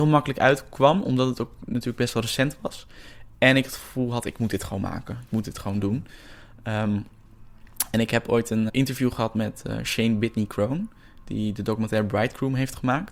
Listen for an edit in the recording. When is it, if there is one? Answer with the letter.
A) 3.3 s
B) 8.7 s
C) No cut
B